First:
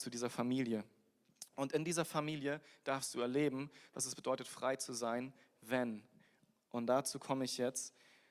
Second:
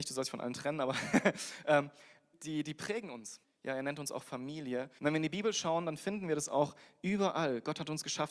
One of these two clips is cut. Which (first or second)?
second